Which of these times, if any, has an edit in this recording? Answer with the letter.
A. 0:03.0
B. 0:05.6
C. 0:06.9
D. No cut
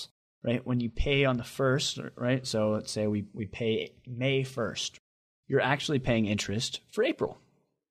D